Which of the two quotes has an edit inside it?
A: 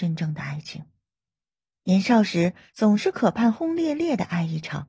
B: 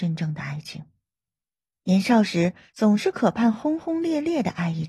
A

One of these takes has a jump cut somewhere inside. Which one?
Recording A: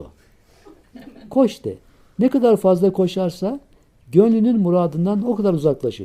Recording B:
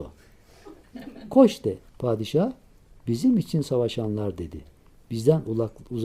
B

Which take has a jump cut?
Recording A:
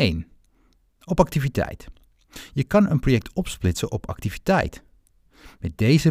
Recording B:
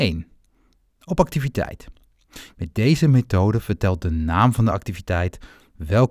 B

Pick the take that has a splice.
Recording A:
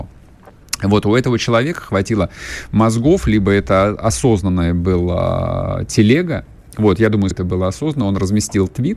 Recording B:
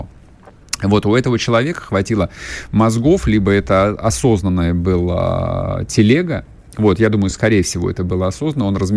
A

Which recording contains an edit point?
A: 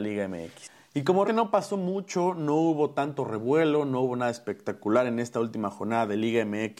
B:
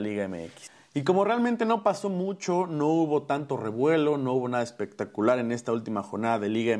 A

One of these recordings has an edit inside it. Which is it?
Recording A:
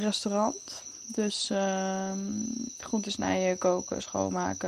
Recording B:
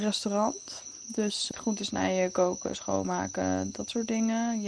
B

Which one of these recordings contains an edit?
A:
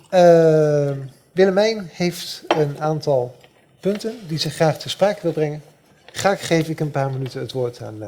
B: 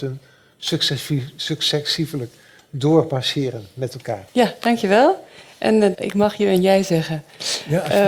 B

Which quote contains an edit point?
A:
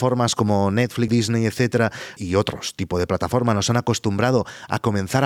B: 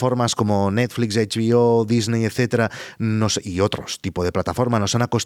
A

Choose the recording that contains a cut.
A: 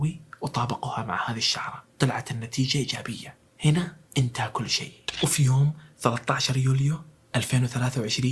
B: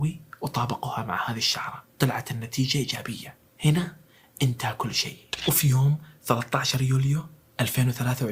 A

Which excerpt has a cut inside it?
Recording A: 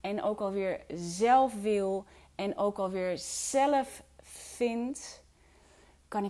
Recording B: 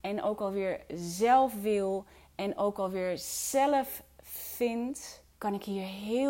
B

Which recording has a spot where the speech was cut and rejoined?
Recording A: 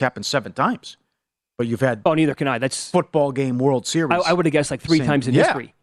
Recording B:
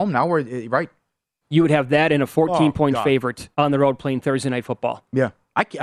B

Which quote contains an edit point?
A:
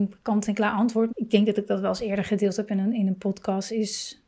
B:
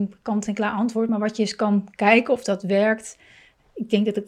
A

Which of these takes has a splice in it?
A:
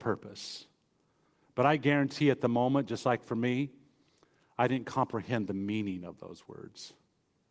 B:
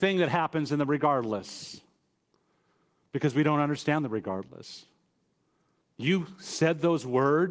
B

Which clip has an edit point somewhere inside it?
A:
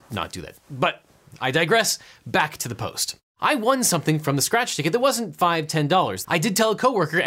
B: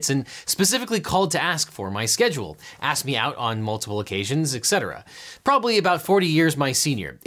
A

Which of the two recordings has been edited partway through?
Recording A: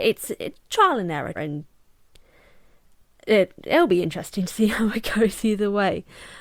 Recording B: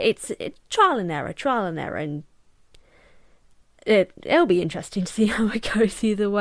A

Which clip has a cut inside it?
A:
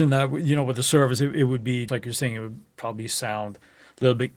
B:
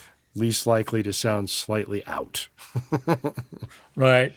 A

